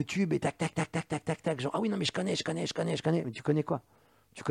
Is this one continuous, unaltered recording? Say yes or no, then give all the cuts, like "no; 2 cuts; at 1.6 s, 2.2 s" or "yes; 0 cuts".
yes; 0 cuts